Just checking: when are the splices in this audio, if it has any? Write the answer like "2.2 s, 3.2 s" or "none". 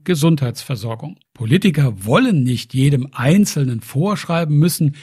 1.2 s